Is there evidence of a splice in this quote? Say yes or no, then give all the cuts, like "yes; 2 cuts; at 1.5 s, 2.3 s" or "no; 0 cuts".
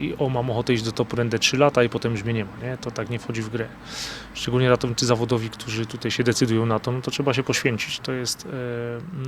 yes; 1 cut; at 1.1 s